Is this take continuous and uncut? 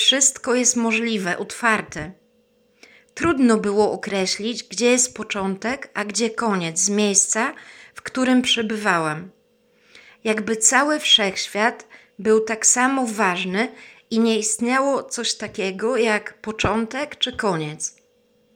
yes; 0 cuts

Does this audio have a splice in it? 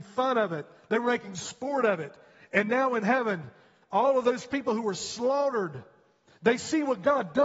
no; 0 cuts

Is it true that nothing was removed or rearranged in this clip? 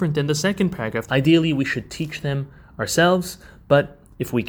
no; 1 cut; at 1.1 s

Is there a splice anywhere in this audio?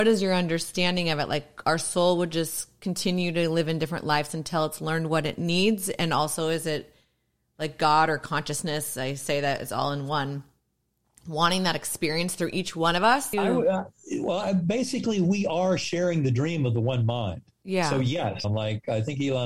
yes; 2 cuts; at 13.3 s, 18.4 s

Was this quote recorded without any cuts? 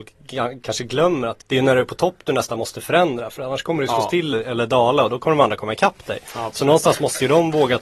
no; 2 cuts; at 1.4 s, 4.3 s

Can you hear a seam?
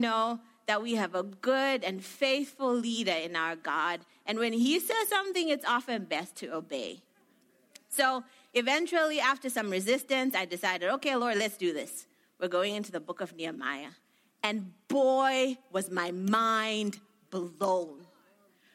no; 0 cuts

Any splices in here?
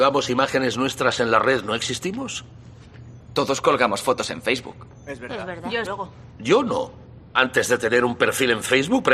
yes; 1 cut; at 5.9 s

